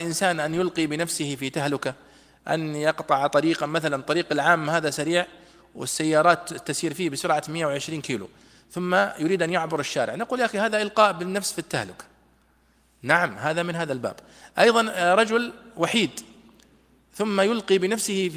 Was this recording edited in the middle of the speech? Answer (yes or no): no